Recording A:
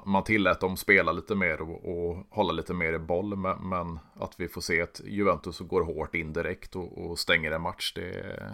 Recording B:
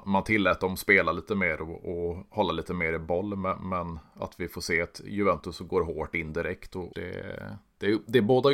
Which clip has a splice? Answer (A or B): B